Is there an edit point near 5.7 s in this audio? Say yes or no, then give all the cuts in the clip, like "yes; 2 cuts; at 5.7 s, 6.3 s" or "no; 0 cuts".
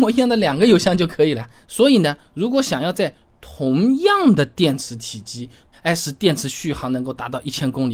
yes; 2 cuts; at 1.6 s, 5.7 s